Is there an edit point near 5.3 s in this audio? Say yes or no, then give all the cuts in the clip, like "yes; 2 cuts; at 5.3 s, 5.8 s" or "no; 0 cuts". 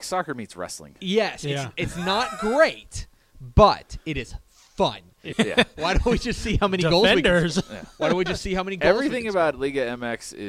yes; 1 cut; at 5.3 s